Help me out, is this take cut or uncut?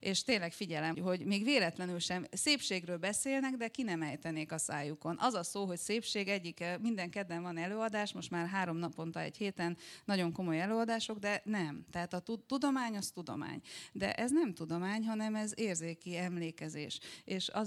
cut